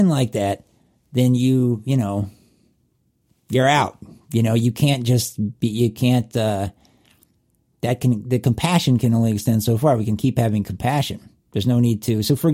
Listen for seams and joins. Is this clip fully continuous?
yes; 0 cuts

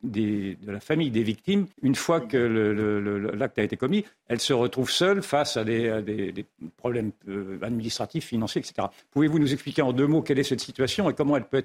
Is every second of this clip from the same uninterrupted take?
no; 1 cut; at 1.7 s

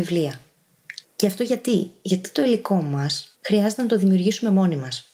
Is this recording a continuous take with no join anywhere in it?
no; 2 cuts; at 1.0 s, 3.3 s

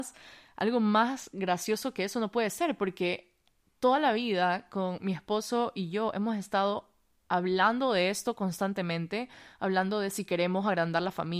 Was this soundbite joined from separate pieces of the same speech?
no; 0 cuts

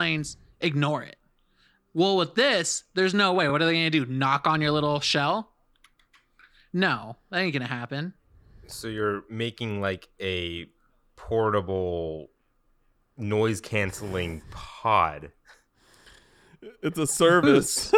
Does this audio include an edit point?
no; 0 cuts

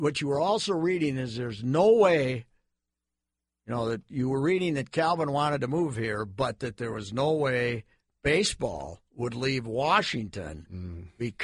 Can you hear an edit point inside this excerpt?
no; 0 cuts

